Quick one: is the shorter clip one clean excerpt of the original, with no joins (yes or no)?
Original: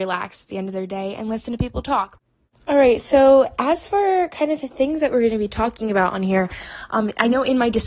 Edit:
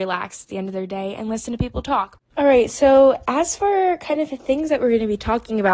no